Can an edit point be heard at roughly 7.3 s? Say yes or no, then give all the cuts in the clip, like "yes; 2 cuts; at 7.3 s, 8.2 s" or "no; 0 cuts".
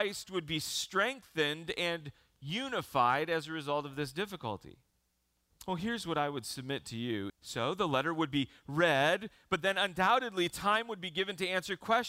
yes; 2 cuts; at 5.5 s, 7.3 s